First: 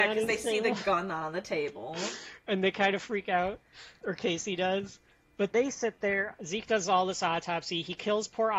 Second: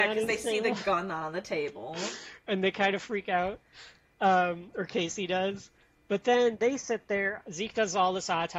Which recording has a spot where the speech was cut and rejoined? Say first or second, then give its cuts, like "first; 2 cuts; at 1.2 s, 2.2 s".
first; 2 cuts; at 4.0 s, 5.5 s